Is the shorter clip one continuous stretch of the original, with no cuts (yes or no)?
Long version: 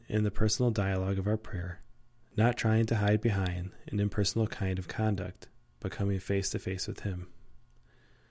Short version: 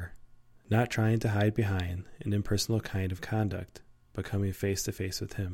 yes